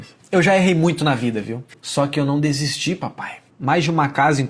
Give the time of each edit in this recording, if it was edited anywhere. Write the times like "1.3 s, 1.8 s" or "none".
1.7 s, 3.5 s